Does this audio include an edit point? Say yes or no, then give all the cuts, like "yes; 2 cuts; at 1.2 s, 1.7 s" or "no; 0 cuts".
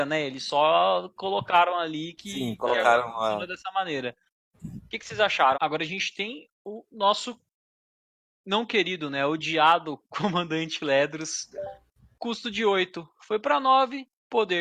yes; 1 cut; at 5.5 s